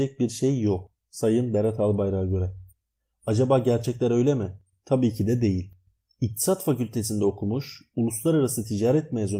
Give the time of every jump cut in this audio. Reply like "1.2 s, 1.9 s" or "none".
none